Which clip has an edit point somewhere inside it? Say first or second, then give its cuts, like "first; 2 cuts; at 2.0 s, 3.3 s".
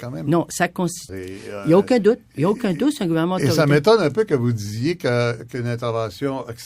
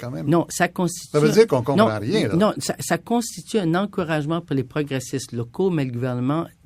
first; 1 cut; at 1.1 s